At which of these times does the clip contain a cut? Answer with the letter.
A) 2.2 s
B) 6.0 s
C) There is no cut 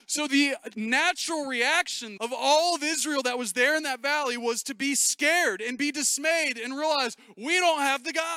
A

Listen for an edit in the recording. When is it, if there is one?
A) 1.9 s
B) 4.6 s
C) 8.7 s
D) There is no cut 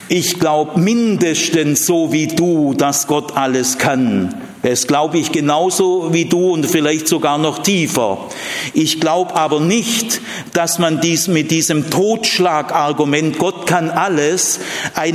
D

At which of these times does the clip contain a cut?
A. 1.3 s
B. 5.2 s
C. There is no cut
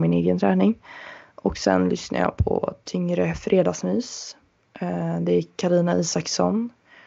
C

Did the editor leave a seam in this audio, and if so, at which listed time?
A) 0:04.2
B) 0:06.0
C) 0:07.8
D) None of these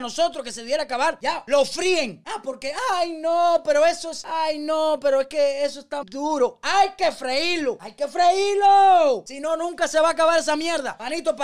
B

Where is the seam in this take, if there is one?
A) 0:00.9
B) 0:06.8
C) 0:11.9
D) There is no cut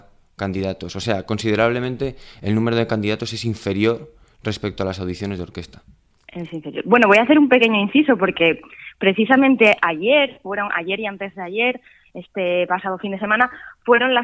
D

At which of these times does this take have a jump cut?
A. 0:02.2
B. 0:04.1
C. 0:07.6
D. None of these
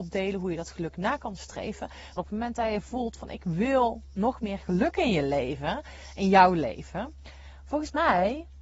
A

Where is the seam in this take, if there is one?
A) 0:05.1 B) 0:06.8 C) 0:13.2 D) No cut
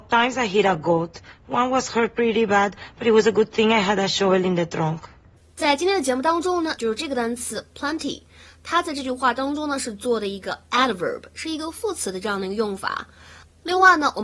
B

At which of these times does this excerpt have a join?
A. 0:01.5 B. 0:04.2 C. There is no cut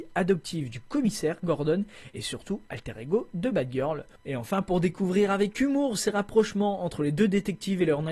B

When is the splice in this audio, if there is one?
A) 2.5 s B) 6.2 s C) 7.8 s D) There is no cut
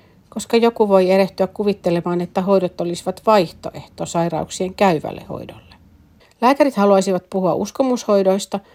B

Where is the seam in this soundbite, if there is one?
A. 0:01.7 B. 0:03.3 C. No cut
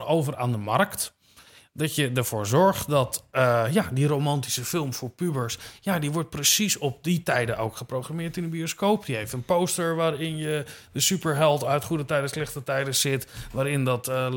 C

